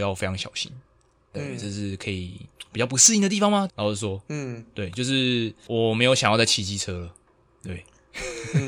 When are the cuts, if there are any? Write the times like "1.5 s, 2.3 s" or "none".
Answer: 3.7 s